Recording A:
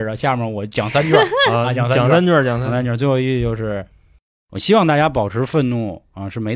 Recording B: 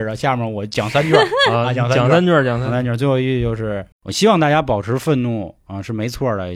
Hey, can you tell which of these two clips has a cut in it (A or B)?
B